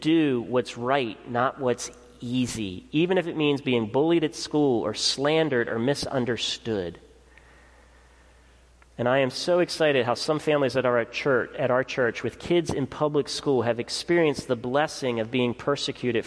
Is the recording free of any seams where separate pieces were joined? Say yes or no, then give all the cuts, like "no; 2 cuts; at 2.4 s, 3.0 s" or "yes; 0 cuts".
yes; 0 cuts